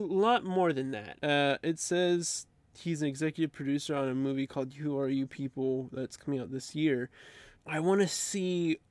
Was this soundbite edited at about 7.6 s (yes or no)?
yes